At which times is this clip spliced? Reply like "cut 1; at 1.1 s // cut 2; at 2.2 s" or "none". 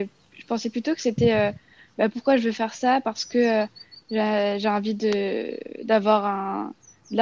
none